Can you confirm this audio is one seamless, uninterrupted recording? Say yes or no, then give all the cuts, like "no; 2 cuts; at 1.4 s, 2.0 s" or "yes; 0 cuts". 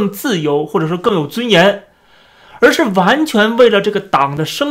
yes; 0 cuts